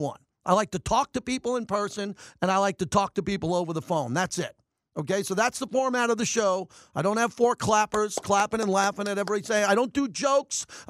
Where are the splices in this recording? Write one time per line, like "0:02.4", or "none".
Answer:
none